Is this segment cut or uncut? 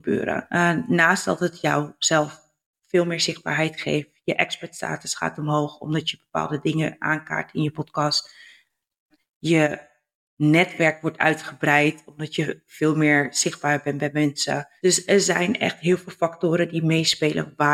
uncut